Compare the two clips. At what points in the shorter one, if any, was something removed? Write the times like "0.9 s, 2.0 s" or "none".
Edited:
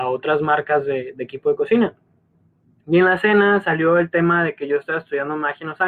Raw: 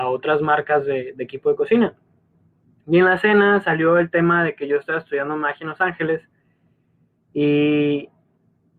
none

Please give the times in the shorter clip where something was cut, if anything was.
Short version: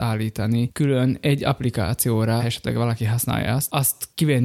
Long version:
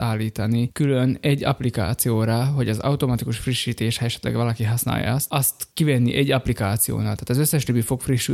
2.4 s

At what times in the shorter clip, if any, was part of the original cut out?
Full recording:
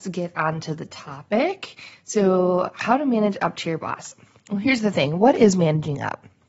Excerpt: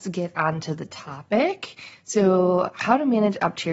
none

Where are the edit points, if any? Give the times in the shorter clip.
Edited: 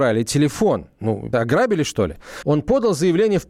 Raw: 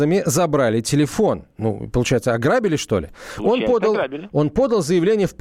1.3 s, 2.4 s

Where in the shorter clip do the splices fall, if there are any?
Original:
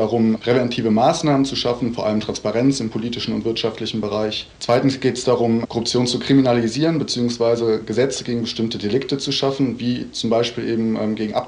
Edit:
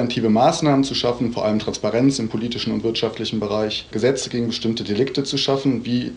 3.9 s

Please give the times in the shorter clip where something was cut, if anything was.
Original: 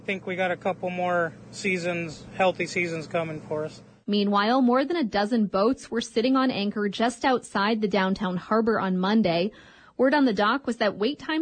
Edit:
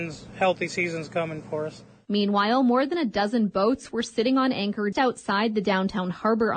4.9 s

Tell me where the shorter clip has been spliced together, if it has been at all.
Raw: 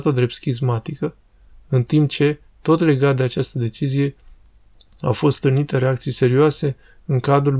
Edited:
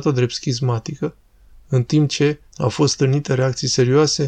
2.5 s

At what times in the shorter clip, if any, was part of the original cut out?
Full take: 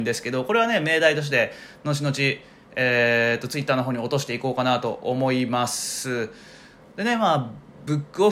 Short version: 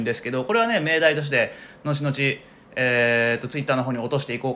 none

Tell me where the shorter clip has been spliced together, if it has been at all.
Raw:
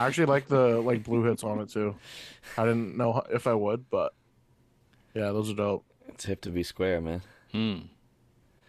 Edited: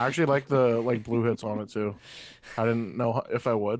none

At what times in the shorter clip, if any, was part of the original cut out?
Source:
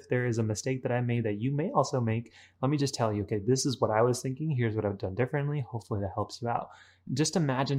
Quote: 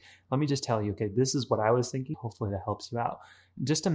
2.1 s

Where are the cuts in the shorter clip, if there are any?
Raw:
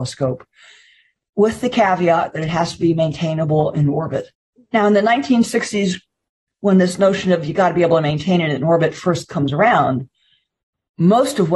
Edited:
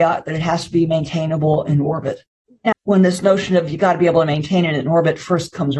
2.7 s

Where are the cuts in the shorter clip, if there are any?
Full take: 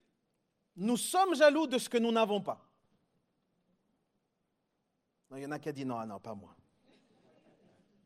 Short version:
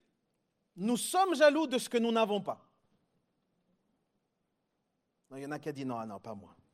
none

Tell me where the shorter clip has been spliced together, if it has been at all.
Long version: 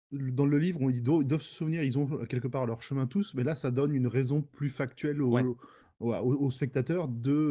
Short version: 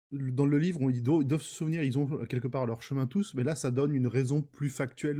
none

